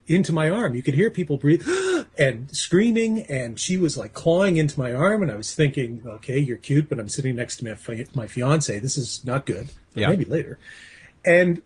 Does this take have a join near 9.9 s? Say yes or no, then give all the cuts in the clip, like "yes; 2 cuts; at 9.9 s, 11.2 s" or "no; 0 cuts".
no; 0 cuts